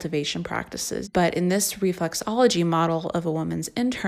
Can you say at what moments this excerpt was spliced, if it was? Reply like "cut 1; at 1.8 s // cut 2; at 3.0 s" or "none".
cut 1; at 1.1 s